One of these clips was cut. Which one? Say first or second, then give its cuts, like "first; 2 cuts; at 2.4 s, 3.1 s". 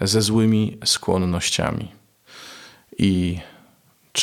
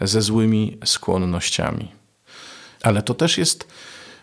second; 1 cut; at 2.8 s